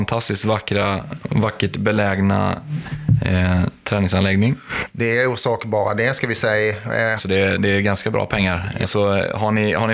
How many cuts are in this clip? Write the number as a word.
two